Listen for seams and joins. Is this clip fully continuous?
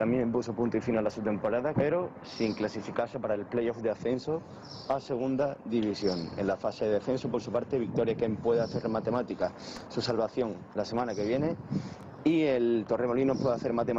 no; 1 cut; at 1.7 s

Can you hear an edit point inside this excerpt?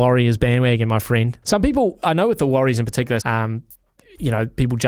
yes; 2 cuts; at 1.4 s, 3.2 s

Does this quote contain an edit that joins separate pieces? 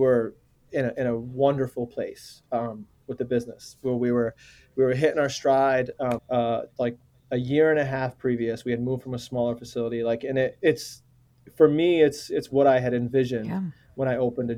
yes; 1 cut; at 6.2 s

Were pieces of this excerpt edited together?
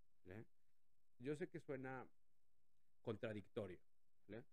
yes; 1 cut; at 1.2 s

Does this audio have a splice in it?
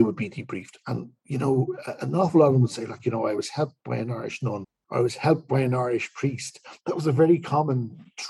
no; 0 cuts

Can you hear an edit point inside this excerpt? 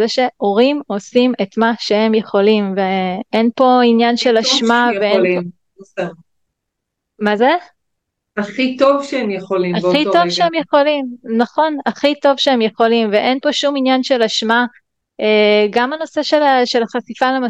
no; 0 cuts

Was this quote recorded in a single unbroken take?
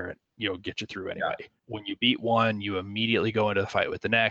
no; 1 cut; at 1.6 s

